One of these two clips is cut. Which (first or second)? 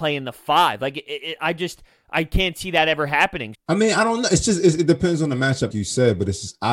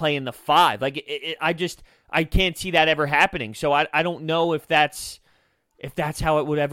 first